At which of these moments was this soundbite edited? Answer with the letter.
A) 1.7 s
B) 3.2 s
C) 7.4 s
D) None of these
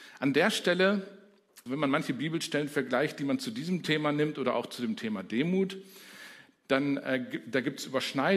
A